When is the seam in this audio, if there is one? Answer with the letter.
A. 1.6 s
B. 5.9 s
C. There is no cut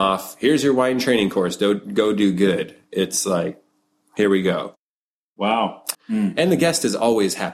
B